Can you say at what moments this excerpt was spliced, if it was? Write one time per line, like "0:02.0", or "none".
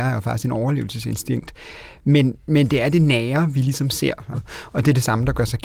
0:04.3